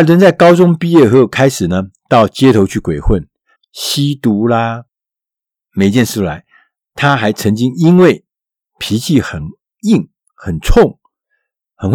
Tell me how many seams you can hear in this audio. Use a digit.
1